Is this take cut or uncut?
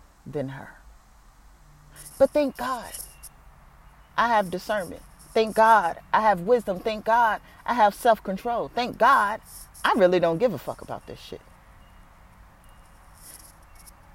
cut